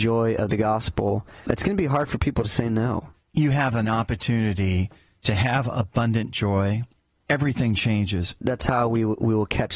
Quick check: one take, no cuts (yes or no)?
no